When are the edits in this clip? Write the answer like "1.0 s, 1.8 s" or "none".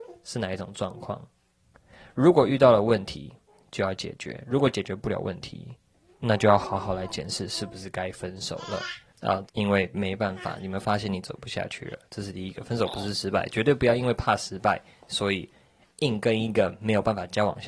9.5 s